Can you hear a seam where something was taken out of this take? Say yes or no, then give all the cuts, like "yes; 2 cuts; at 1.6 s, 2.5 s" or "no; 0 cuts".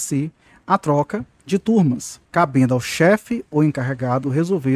yes; 1 cut; at 2.3 s